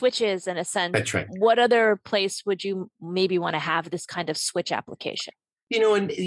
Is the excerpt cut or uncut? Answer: uncut